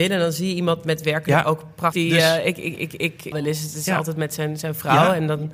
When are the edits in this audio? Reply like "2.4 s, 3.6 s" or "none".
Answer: 1.9 s, 3.3 s